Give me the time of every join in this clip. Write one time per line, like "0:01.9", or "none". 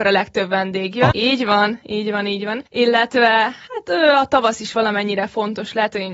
0:01.1
0:02.7